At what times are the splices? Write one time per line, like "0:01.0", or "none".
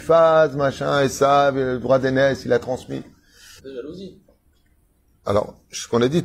0:03.6